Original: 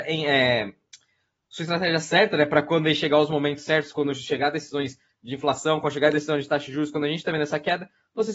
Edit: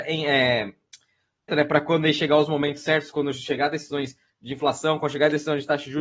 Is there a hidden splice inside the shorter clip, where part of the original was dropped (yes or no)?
yes